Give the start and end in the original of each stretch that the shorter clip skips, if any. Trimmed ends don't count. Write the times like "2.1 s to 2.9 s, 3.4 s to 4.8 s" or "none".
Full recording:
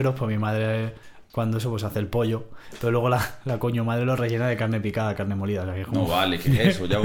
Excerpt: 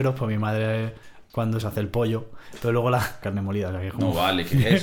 1.6 s to 1.8 s, 3.4 s to 5.2 s